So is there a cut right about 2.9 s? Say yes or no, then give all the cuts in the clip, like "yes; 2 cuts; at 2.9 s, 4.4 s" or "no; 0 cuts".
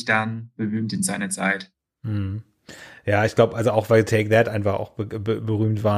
no; 0 cuts